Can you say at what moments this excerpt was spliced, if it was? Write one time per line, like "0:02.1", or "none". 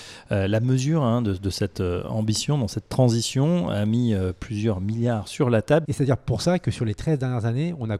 0:05.8